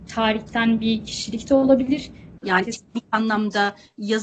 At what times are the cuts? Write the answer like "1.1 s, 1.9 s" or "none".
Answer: 2.4 s